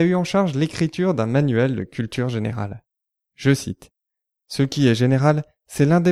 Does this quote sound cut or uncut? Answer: uncut